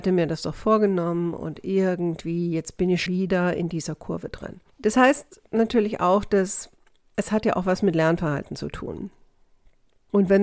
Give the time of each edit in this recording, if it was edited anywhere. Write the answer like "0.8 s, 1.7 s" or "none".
3.1 s